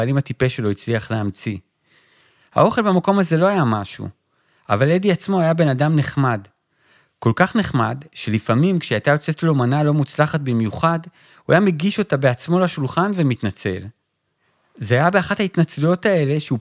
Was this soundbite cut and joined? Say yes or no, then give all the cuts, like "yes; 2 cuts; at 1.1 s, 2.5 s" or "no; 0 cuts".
no; 0 cuts